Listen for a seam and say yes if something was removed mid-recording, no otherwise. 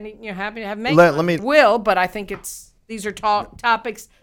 yes